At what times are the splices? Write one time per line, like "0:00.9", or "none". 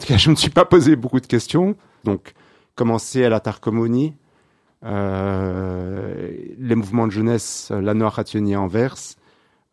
0:02.0